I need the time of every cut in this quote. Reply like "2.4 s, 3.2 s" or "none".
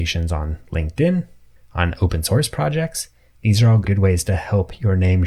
1.6 s, 3.9 s